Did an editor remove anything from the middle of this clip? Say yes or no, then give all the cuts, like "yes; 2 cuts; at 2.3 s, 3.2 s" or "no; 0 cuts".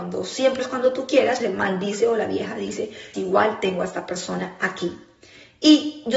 yes; 2 cuts; at 1.4 s, 3.1 s